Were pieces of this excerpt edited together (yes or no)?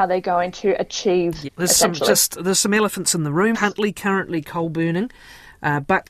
yes